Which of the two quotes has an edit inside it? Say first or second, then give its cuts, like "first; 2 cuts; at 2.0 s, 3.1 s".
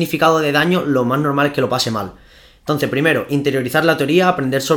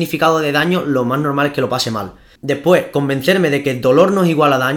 second; 1 cut; at 2.4 s